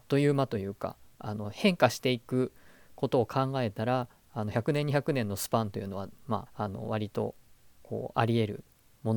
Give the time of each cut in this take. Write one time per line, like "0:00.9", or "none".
0:06.5